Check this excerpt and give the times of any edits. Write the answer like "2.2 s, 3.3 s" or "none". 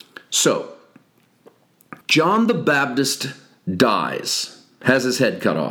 2.0 s

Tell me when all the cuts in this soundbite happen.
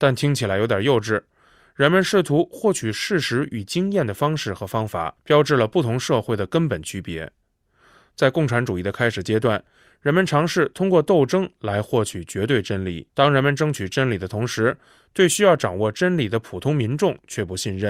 13.1 s

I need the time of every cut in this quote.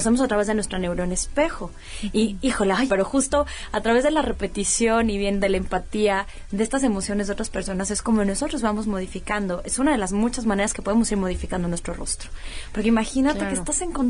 2.9 s, 12.7 s

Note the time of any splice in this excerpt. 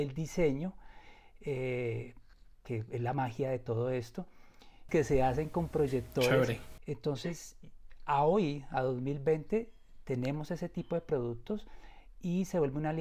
4.9 s, 6.8 s

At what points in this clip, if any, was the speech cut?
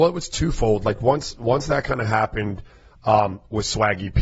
none

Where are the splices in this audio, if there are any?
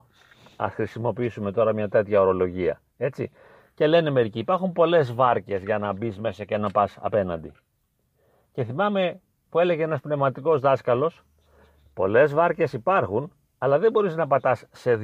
none

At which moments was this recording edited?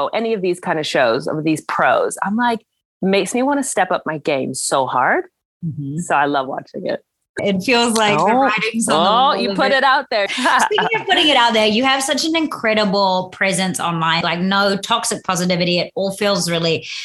7.4 s, 10.3 s, 14.2 s

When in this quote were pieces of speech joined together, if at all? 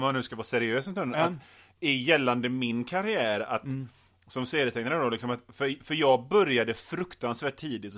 none

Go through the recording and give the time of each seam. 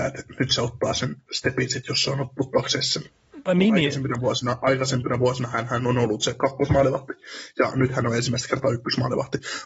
none

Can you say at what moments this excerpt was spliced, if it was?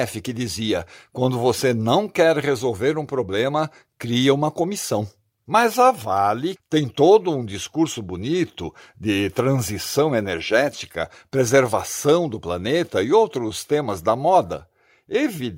5.5 s, 6.6 s

